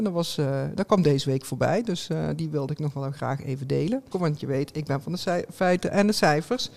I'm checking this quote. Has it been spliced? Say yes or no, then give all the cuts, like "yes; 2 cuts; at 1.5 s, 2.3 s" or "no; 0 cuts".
yes; 1 cut; at 4.1 s